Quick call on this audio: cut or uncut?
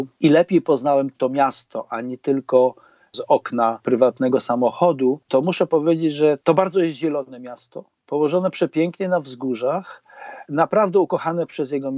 cut